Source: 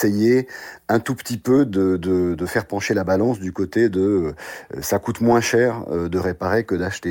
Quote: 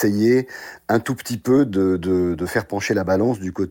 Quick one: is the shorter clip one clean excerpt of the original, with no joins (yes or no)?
yes